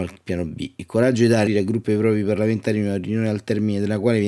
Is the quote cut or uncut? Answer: cut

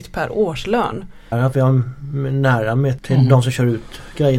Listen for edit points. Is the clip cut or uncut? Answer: cut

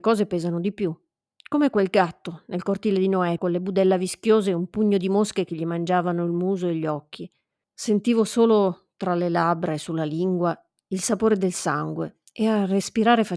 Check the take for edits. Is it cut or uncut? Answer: cut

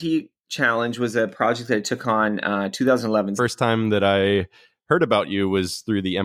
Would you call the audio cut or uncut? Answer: cut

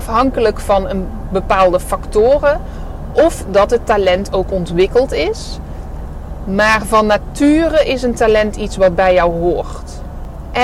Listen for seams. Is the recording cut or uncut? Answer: uncut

